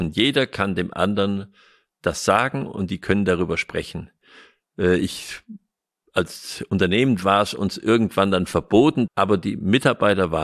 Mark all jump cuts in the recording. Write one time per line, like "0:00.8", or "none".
0:09.1